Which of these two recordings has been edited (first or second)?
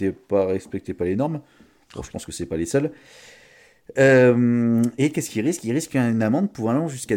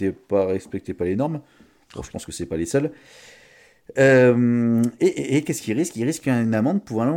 first